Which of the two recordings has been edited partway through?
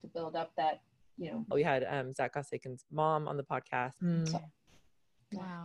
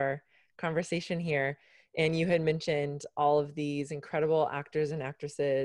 first; 2 cuts; at 1.5 s, 4.0 s

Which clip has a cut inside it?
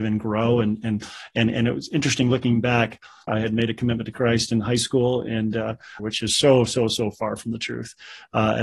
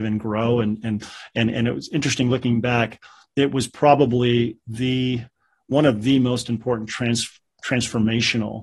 first; 2 cuts; at 3.3 s, 6.0 s

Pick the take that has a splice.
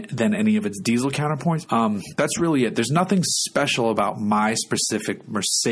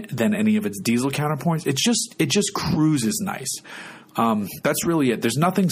first; 1 cut; at 1.6 s

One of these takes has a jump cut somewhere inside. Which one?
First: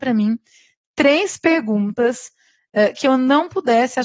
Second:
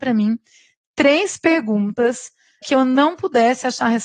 second; 1 cut; at 2.6 s

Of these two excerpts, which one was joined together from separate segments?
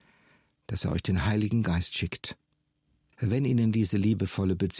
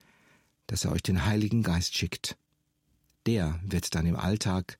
first; 1 cut; at 3.1 s

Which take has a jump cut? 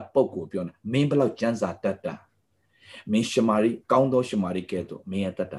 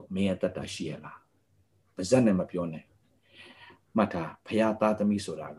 first; 1 cut; at 3.8 s

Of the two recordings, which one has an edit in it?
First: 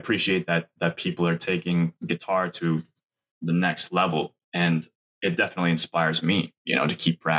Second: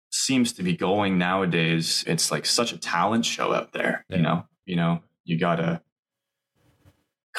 second; 2 cuts; at 2.0 s, 4.6 s

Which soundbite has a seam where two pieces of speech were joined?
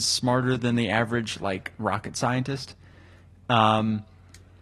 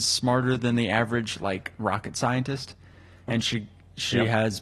second; 1 cut; at 3.3 s

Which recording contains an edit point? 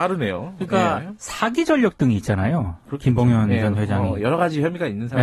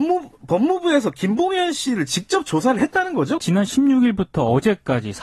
second; 1 cut; at 3.4 s

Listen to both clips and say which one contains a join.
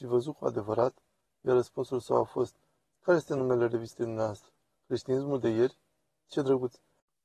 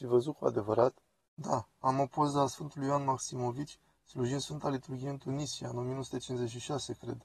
second; 1 cut; at 1.3 s

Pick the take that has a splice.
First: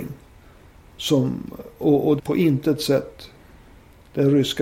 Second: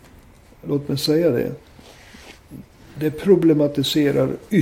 first; 1 cut; at 2.2 s

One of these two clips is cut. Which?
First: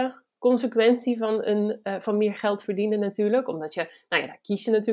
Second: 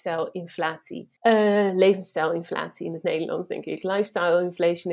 second; 1 cut; at 1.2 s

